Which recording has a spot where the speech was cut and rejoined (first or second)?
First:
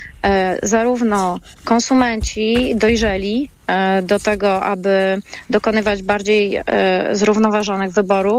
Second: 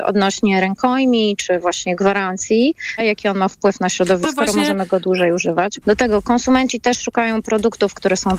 second